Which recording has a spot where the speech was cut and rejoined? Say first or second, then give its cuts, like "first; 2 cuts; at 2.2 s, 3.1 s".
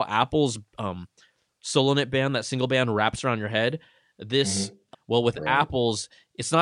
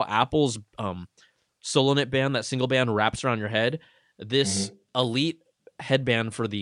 first; 1 cut; at 4.9 s